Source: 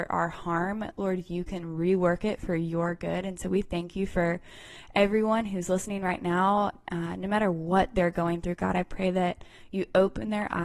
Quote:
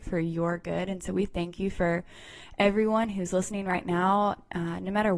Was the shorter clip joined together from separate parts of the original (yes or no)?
no